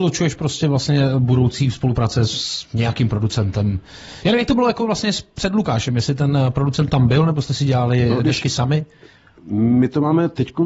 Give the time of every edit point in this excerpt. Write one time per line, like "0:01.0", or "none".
none